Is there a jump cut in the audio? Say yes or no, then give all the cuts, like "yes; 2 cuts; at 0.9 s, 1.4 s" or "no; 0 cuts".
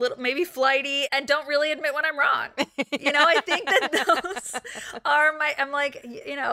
no; 0 cuts